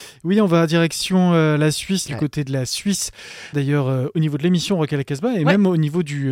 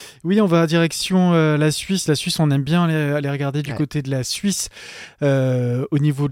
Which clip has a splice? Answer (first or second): first